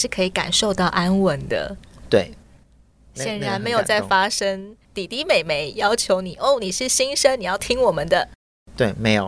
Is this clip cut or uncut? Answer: uncut